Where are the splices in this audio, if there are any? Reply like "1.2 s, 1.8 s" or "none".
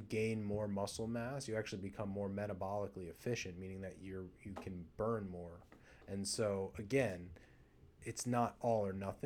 none